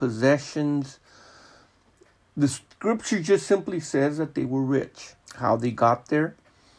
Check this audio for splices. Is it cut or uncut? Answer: cut